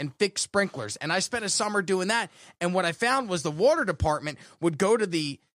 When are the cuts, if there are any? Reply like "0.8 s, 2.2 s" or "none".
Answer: none